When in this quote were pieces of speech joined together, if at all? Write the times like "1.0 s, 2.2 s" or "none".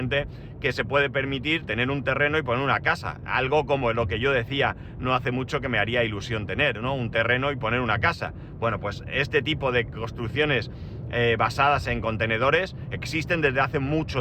none